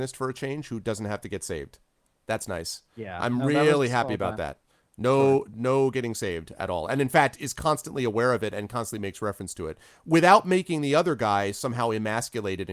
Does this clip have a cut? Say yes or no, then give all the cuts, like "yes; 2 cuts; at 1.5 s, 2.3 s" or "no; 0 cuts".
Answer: no; 0 cuts